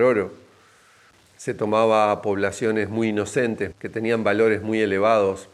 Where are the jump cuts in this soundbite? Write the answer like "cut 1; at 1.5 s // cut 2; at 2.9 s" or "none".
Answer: cut 1; at 3.7 s

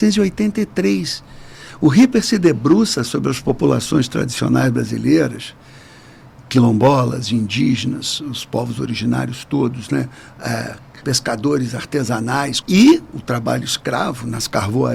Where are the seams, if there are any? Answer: cut 1; at 6.4 s // cut 2; at 11.0 s // cut 3; at 12.6 s

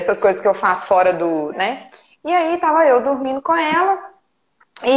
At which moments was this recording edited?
cut 1; at 1.5 s

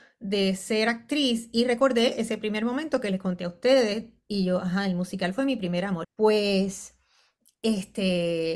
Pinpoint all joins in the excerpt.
cut 1; at 6.0 s

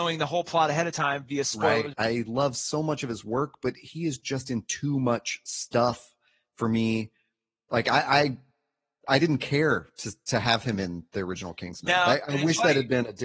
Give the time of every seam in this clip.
cut 1; at 1.9 s

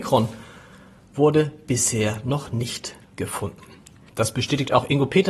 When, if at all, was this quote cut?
cut 1; at 4.1 s

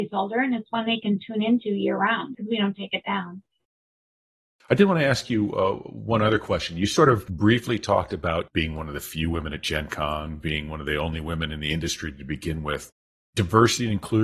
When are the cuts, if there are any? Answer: cut 1; at 2.3 s

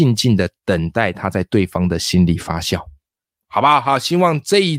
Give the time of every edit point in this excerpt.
none

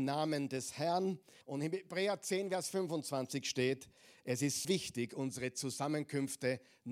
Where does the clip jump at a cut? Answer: cut 1; at 1.4 s // cut 2; at 4.6 s

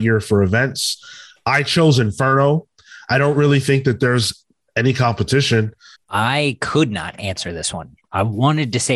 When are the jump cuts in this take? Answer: cut 1; at 5.9 s

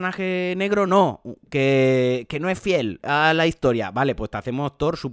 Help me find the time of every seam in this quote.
none

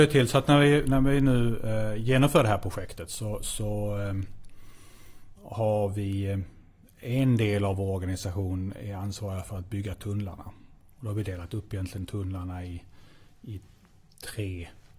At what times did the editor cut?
none

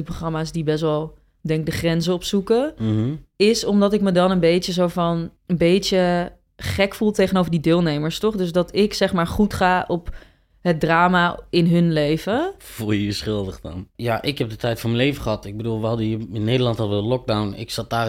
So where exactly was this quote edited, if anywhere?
cut 1; at 5.4 s // cut 2; at 14.0 s

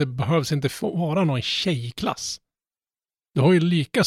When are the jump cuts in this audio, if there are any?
none

